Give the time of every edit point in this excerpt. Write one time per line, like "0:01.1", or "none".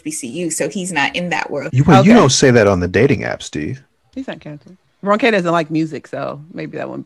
0:01.7
0:04.1

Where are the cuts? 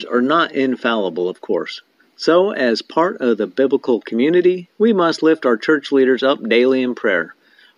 none

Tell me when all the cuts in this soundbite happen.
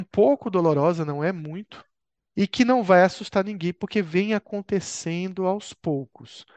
0:02.3

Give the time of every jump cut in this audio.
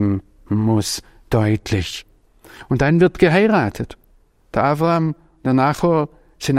none

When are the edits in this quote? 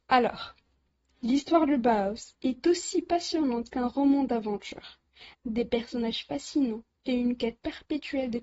0:05.3

